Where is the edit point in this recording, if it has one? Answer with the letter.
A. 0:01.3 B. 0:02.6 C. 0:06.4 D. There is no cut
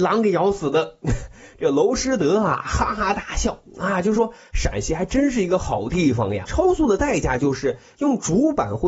C